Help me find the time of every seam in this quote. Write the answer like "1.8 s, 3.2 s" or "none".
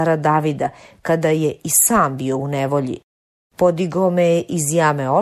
3.5 s